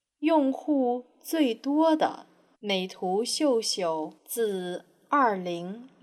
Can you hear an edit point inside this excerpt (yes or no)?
yes